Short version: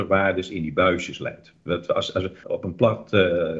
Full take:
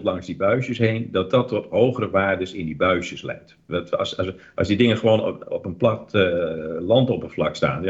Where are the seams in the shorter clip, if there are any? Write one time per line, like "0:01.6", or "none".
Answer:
0:02.4